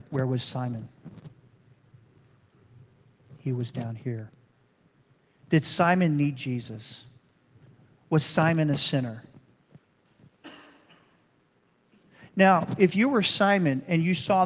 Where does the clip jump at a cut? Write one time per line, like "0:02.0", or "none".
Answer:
none